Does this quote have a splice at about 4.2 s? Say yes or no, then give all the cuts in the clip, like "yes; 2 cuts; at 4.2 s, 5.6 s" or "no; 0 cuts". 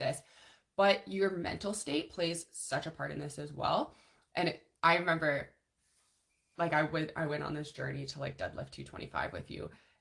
no; 0 cuts